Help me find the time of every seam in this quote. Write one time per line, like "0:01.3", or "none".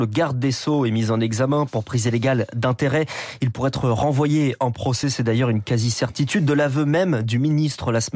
none